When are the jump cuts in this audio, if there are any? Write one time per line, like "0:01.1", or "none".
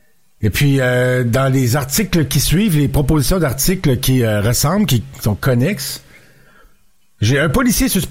none